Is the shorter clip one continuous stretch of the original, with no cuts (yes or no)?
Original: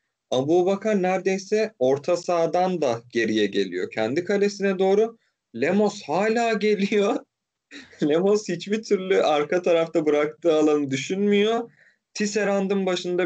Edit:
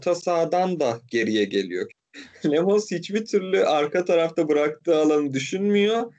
no